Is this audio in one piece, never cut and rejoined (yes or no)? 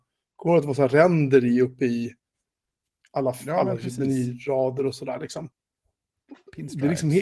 yes